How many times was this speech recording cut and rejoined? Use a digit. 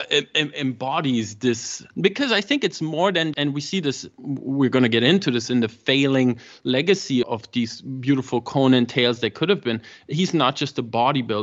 3